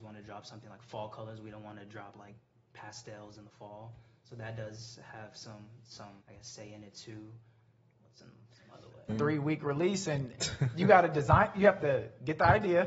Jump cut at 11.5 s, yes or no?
no